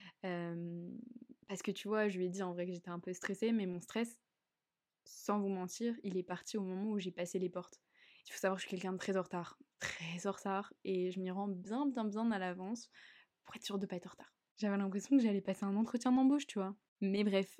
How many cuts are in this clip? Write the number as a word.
one